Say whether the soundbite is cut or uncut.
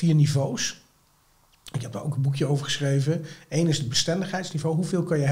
uncut